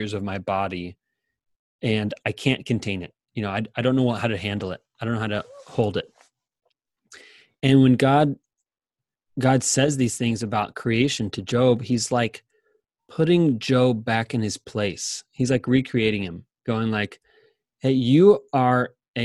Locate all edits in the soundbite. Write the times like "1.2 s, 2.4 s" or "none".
none